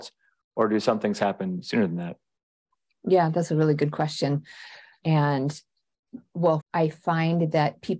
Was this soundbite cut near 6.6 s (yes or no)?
yes